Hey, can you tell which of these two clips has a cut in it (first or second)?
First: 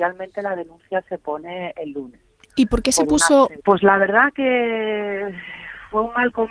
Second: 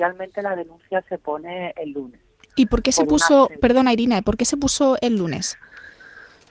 first